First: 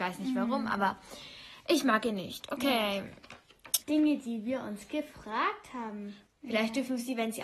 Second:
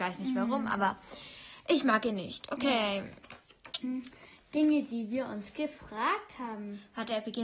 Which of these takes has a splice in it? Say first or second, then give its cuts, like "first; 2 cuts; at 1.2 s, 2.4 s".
first; 2 cuts; at 3.8 s, 6.3 s